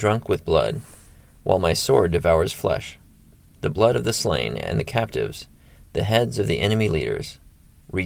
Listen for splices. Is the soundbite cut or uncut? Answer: uncut